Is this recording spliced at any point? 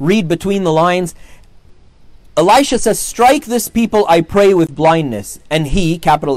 no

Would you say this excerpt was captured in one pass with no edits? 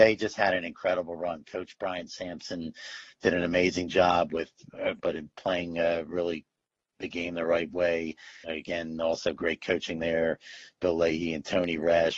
no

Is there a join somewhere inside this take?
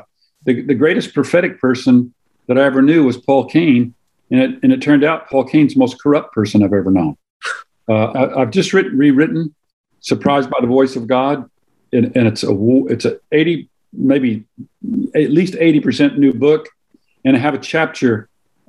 yes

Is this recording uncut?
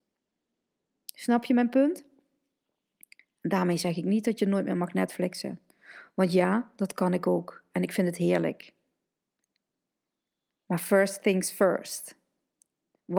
yes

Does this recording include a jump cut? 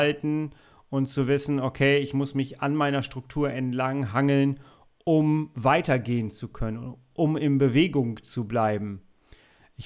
no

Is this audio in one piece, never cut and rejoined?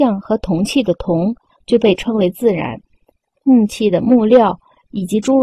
yes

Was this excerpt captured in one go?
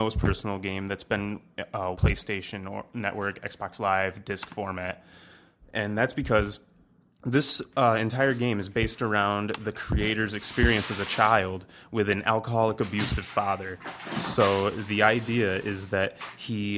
no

